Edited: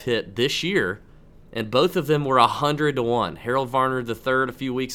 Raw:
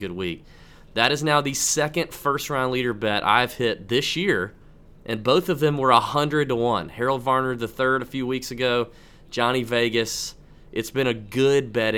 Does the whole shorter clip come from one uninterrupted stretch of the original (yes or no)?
yes